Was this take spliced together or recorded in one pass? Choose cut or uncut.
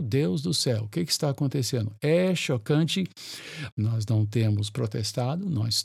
cut